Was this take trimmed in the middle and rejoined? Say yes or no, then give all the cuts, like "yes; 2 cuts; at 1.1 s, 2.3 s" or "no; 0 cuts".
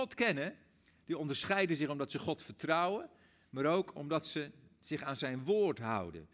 no; 0 cuts